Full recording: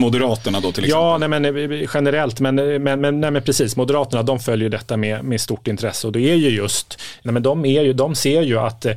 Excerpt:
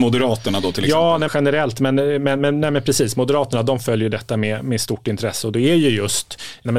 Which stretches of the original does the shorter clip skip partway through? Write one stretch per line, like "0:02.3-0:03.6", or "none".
0:01.3-0:01.9